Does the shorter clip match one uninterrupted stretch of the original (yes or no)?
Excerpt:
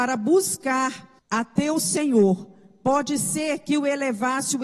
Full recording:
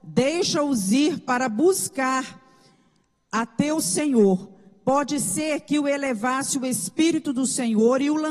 no